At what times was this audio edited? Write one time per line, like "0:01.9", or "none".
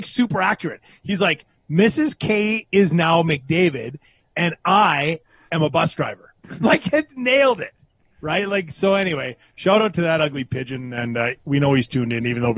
none